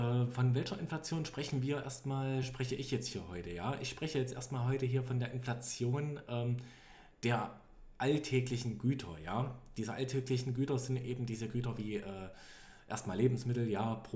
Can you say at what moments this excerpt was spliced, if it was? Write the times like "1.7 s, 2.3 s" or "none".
none